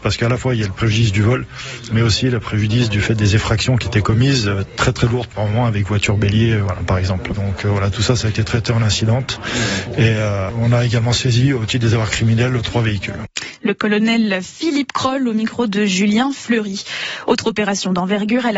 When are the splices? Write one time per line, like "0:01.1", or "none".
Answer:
0:07.3